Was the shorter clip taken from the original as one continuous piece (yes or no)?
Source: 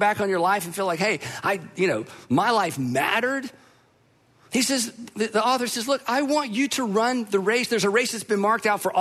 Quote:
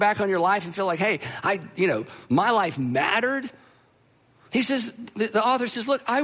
yes